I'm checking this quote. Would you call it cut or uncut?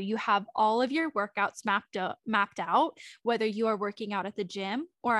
uncut